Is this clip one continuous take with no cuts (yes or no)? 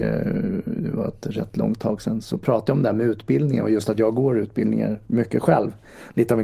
no